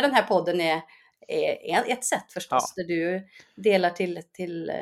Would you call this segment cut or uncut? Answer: uncut